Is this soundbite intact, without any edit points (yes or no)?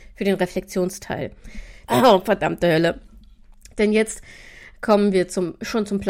no